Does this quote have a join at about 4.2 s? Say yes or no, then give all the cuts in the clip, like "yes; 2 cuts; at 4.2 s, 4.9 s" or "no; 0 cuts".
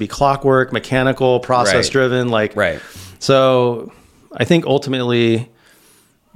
no; 1 cut; at 2.5 s